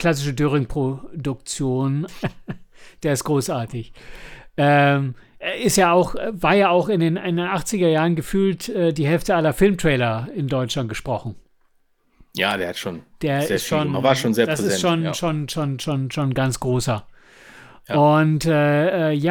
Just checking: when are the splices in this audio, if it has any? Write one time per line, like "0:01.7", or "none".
0:02.1